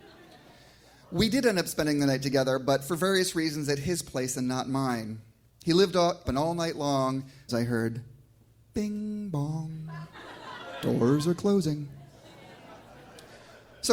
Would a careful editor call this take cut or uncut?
cut